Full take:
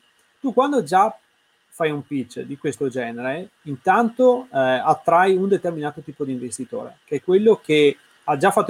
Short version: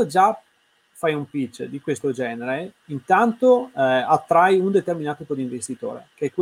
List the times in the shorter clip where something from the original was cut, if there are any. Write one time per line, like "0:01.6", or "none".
0:05.3